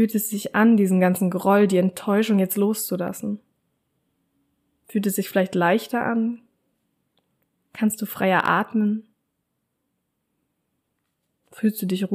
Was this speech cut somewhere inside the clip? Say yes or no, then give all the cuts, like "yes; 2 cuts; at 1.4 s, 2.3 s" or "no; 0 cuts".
no; 0 cuts